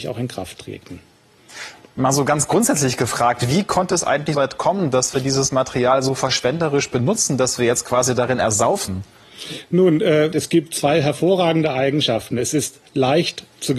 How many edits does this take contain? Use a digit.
2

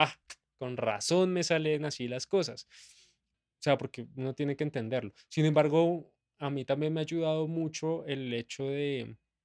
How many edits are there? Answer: 1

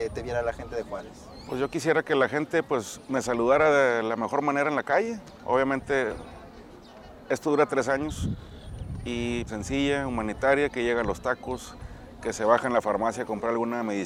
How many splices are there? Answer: 1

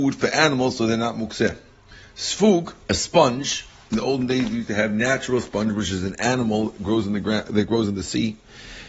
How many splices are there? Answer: 1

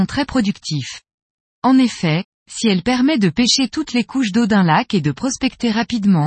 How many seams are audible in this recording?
1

